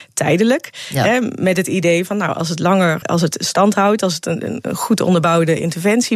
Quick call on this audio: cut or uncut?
cut